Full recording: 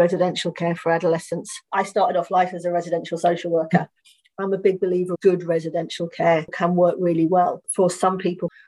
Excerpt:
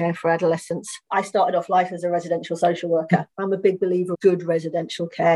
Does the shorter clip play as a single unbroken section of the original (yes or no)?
no